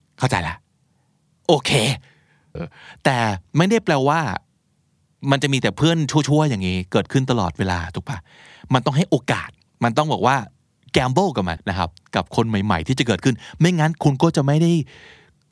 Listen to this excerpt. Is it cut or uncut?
cut